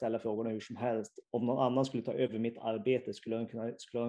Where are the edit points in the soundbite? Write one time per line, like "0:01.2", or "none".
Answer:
0:01.3

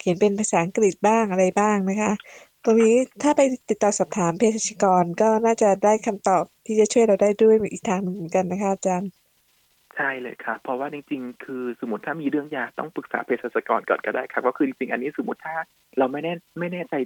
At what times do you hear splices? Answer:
none

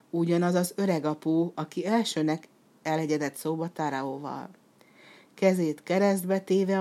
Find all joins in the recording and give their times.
none

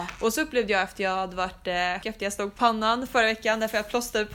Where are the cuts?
0:02.0

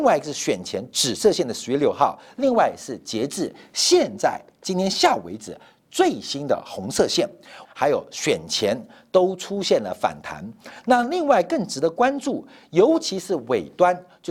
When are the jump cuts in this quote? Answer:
0:07.7

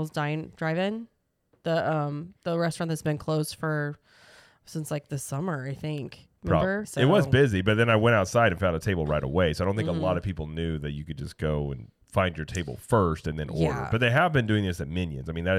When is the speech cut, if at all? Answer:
0:06.8

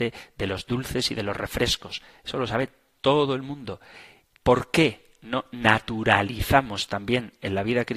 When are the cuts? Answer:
0:04.4

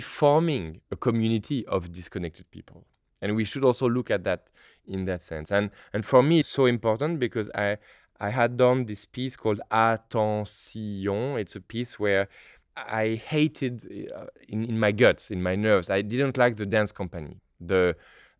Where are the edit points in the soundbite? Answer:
0:06.4

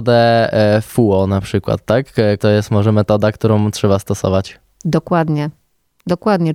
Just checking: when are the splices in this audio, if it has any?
0:02.4

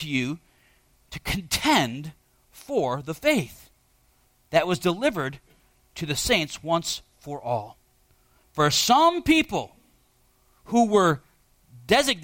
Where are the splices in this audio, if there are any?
none

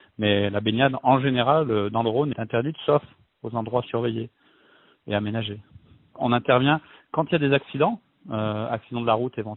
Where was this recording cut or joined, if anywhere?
0:02.3

